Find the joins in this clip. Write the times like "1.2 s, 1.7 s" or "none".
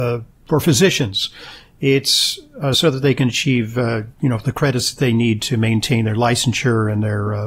none